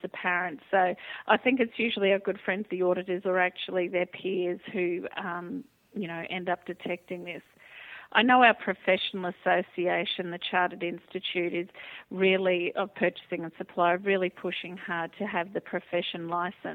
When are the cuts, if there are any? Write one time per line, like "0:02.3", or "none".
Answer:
none